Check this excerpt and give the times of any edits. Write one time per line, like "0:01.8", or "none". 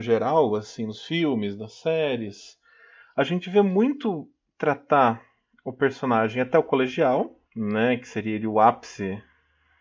0:07.4

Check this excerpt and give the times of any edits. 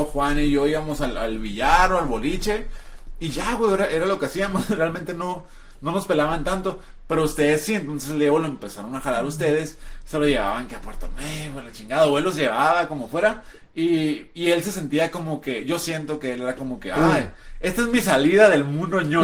none

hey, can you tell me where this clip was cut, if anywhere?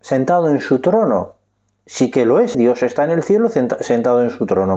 0:02.5

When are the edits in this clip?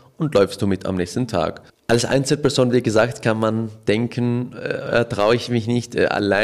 none

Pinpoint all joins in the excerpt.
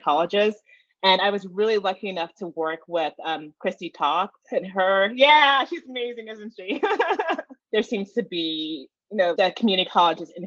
0:07.6
0:09.4

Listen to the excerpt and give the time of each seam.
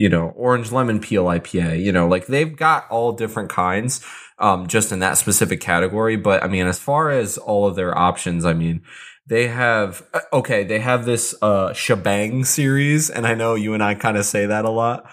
none

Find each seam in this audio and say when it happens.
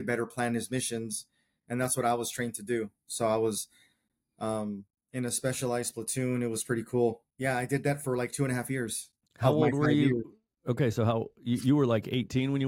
0:07.3

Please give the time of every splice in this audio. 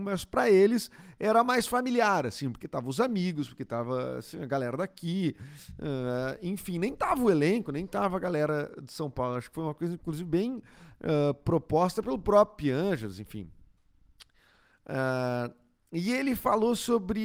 none

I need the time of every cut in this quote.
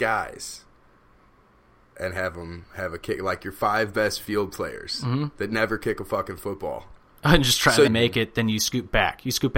0:07.9

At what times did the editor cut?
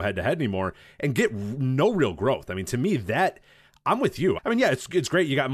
0:04.4

